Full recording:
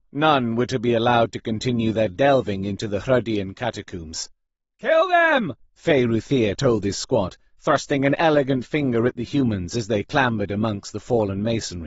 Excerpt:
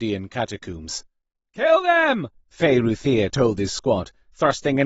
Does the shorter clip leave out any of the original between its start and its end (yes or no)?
no